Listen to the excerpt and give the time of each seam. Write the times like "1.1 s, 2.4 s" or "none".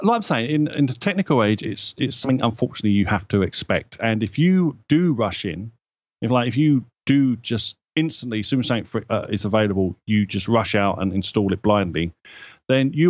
none